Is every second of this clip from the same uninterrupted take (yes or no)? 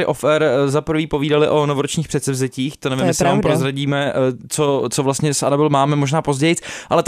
yes